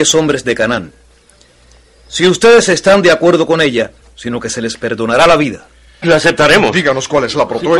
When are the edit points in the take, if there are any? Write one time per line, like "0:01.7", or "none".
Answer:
0:04.0
0:06.0